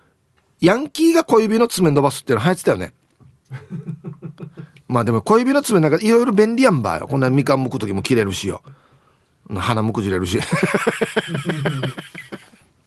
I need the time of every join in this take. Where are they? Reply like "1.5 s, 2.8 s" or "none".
none